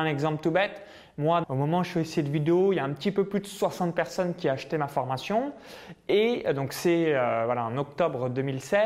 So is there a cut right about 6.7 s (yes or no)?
no